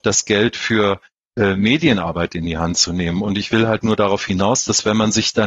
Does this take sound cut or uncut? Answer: uncut